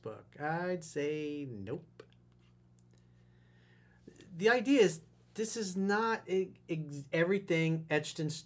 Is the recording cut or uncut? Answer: uncut